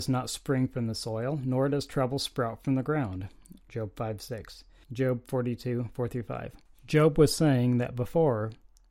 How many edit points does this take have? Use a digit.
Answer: 1